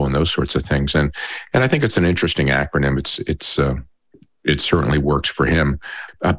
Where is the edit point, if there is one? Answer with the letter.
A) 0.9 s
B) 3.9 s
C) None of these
C